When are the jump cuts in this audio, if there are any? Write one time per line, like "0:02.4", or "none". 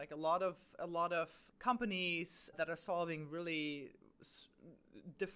0:01.5
0:02.5